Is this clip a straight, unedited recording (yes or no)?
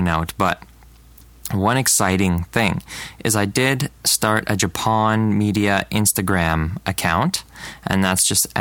yes